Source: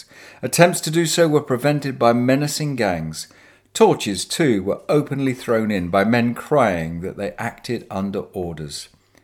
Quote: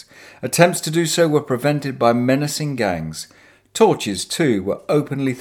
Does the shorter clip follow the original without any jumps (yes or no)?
yes